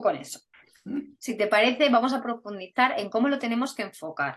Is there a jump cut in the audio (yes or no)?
yes